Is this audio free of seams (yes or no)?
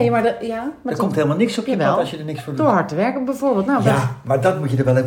yes